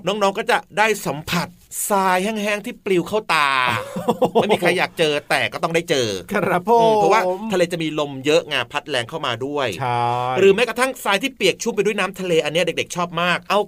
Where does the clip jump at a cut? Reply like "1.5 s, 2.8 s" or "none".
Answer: none